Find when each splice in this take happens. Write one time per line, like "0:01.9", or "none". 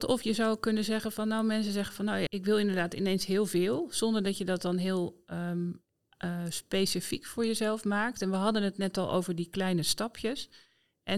0:02.3